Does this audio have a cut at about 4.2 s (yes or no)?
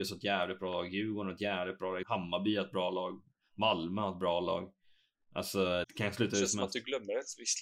no